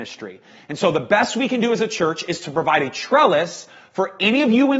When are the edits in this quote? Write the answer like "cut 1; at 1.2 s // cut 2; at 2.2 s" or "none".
none